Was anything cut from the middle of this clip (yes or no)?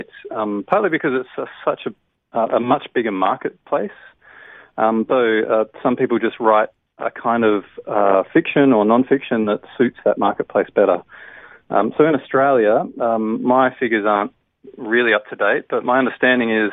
yes